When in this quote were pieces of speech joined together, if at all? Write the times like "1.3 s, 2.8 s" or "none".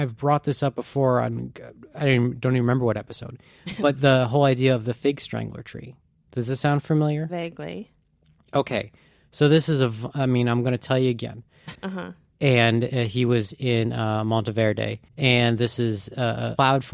11.8 s, 15.1 s